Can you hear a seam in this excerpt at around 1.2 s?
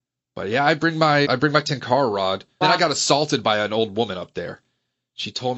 yes; 2 cuts; at 1.2 s, 2.6 s

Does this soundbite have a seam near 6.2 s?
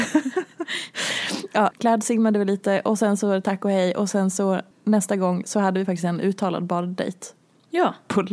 no; 2 cuts; at 1.7 s, 4.7 s

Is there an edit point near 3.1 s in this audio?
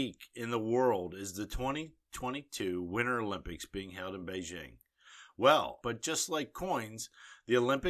no; 1 cut; at 5.8 s

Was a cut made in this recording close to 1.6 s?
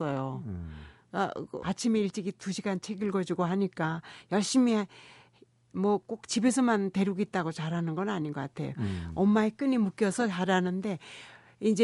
yes; 1 cut; at 1.6 s

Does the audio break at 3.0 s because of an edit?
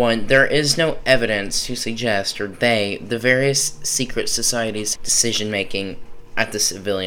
no; 1 cut; at 5.0 s

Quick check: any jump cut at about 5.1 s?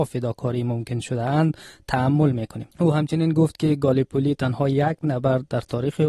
no; 1 cut; at 2.7 s

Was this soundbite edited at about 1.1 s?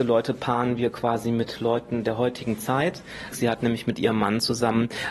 no; 1 cut; at 3.3 s

